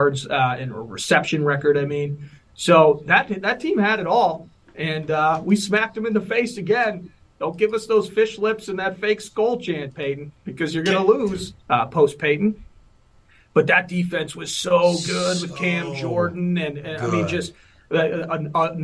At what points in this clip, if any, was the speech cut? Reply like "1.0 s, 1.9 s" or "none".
11.6 s